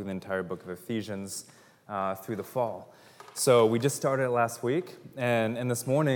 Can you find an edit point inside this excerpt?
no; 0 cuts

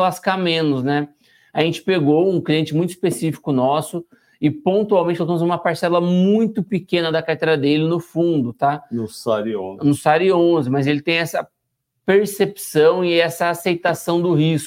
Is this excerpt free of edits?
yes; 0 cuts

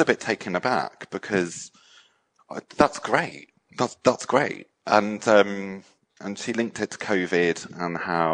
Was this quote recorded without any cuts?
no; 1 cut; at 6.1 s

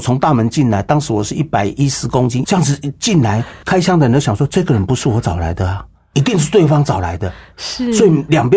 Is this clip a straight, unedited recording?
no; 1 cut; at 2.4 s

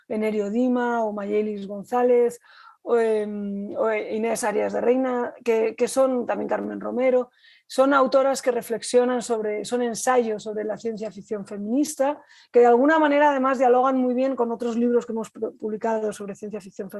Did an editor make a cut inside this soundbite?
no; 0 cuts

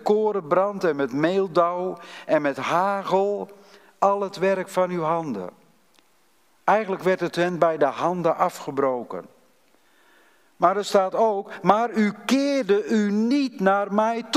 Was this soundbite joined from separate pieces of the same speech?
no; 0 cuts

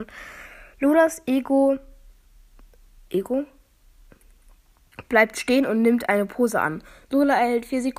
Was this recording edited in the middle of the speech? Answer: no; 0 cuts

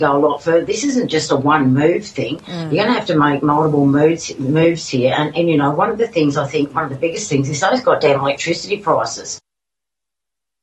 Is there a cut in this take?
no; 0 cuts

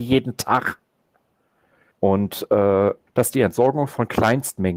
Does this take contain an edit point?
yes; 2 cuts; at 1.9 s, 3.1 s

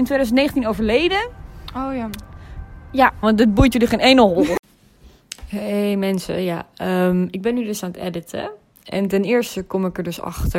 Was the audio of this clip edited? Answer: yes; 1 cut; at 3.2 s

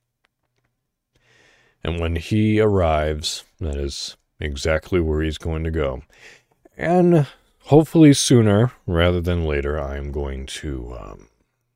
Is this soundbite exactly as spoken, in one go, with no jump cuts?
yes; 0 cuts

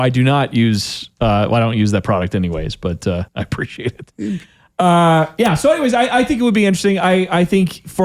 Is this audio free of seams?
no; 1 cut; at 3.3 s

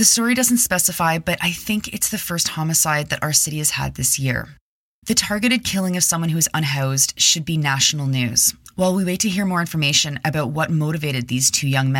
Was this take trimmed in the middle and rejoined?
no; 0 cuts

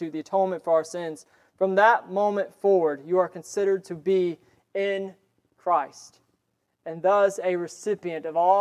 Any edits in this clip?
no; 0 cuts

